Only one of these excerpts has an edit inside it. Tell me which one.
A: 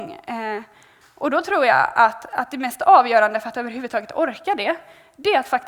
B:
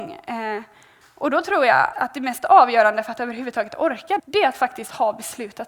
B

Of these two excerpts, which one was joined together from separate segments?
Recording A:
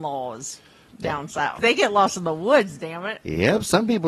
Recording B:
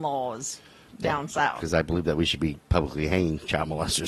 A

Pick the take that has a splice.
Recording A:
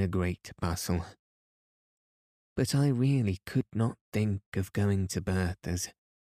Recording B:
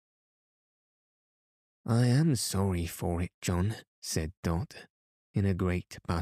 B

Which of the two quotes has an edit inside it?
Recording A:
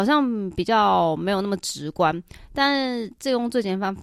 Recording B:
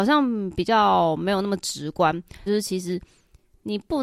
B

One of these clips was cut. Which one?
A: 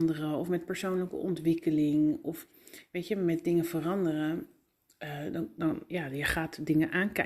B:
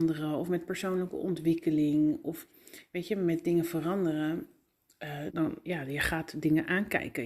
B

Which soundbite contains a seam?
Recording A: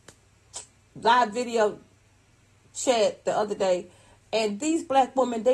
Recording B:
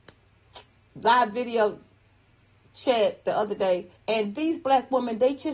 B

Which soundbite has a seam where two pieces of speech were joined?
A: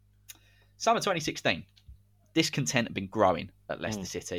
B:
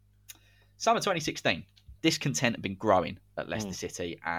B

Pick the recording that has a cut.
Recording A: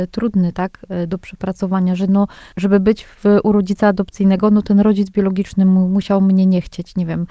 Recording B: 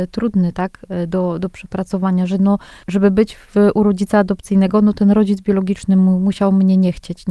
A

